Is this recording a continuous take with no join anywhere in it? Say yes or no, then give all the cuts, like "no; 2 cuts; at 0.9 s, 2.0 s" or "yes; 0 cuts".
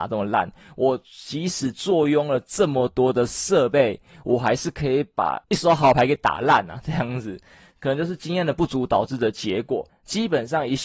no; 1 cut; at 9.9 s